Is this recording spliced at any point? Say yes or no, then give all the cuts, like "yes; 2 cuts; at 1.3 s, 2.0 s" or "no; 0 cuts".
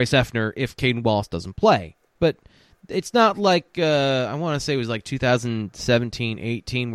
yes; 1 cut; at 2.2 s